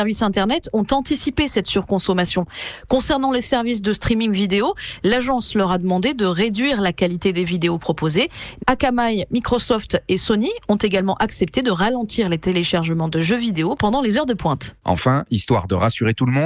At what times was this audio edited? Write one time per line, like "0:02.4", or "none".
0:08.6